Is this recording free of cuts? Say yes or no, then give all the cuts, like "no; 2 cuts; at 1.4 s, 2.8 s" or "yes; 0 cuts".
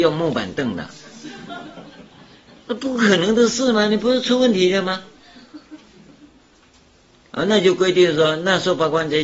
no; 1 cut; at 7.3 s